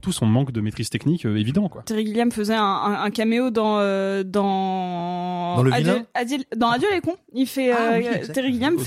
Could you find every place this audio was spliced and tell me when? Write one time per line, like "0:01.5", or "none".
0:01.8